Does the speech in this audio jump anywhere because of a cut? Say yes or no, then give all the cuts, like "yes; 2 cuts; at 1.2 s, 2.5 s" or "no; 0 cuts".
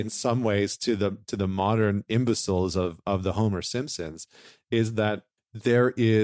no; 0 cuts